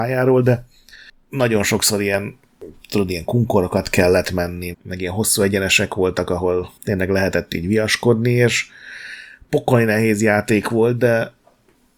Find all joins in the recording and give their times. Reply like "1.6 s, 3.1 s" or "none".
4.7 s, 6.8 s